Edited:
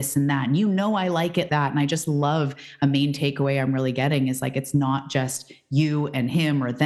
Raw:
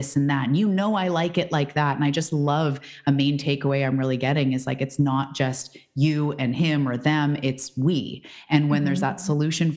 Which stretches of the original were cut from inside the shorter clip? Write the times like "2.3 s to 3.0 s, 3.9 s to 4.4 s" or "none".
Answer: 1.5 s to 1.7 s